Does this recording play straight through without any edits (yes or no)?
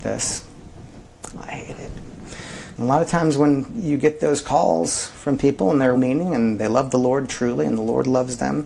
no